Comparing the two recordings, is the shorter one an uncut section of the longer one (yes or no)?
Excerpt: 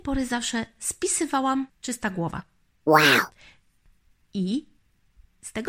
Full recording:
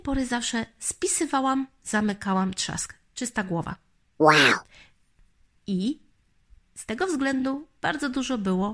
no